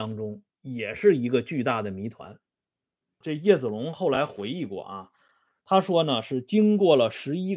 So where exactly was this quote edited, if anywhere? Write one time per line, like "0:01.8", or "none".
0:03.2